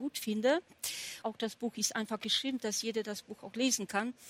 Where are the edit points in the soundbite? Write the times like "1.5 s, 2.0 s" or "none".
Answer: 1.2 s, 2.6 s